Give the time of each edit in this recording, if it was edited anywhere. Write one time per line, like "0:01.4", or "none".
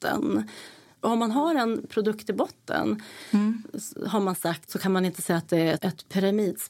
0:04.7
0:05.8